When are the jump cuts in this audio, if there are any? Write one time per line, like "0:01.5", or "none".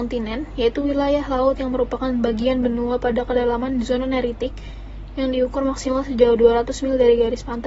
none